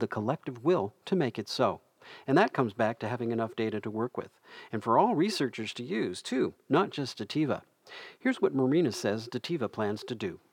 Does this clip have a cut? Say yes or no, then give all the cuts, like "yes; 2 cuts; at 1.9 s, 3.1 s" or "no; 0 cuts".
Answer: no; 0 cuts